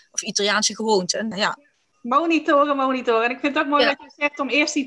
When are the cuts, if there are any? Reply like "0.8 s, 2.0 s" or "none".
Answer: 1.3 s